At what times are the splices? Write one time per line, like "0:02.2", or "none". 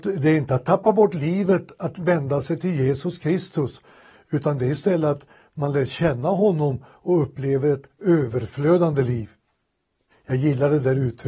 0:10.1